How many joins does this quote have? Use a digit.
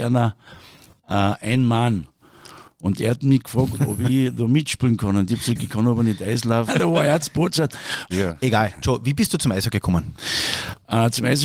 2